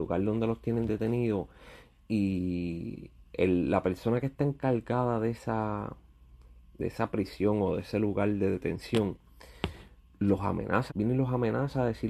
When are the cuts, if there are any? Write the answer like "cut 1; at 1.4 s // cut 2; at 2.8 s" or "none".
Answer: cut 1; at 10.9 s